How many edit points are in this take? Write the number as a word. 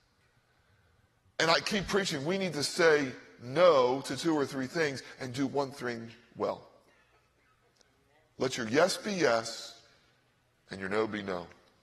zero